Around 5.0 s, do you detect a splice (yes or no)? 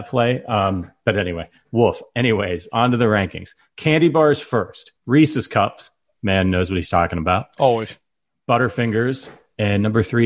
yes